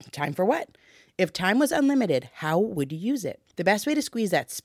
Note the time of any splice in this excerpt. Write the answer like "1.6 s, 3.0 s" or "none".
3.5 s